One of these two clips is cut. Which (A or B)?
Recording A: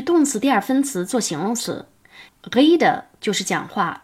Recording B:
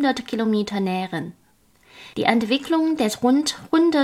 A